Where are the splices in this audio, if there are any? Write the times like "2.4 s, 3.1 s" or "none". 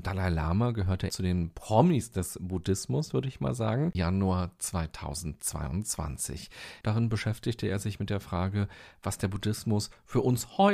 1.1 s, 3.9 s, 6.8 s

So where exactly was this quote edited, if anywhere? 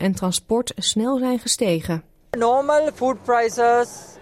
none

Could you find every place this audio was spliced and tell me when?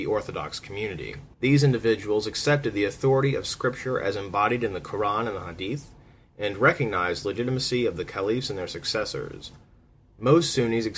1.3 s

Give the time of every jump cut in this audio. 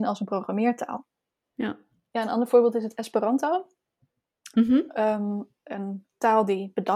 1.4 s

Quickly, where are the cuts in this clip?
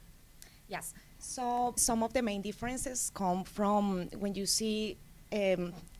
1.8 s

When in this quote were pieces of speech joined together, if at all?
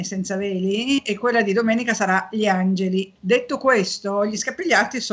3.2 s

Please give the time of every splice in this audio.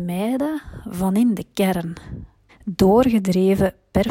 2.5 s

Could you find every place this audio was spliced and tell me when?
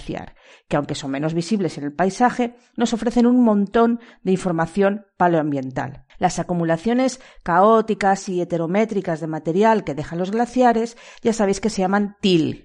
6.1 s

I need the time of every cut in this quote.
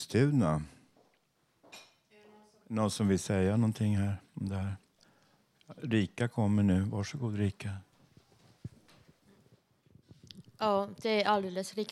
none

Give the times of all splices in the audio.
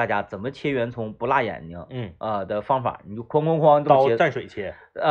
none

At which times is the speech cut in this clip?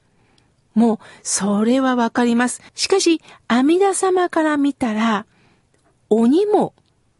2.7 s

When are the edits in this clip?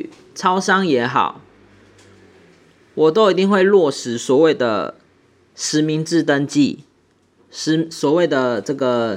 none

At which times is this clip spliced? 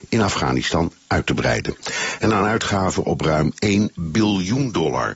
2.2 s

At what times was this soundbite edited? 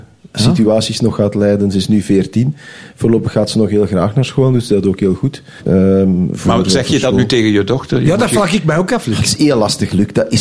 5.6 s

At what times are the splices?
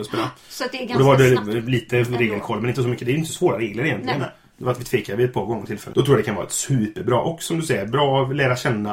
5.9 s

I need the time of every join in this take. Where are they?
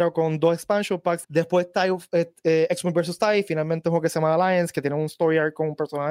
1.2 s

